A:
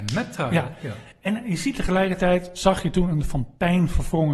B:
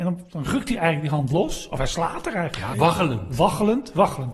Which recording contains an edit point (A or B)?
B